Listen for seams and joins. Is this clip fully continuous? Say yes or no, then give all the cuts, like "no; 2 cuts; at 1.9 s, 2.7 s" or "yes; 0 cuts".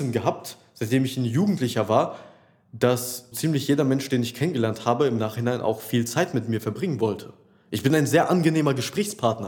no; 1 cut; at 3.3 s